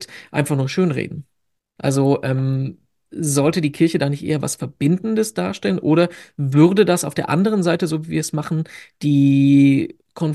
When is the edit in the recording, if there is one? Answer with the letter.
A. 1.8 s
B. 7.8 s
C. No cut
A